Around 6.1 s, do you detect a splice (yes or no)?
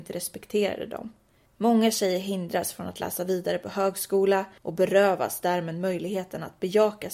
no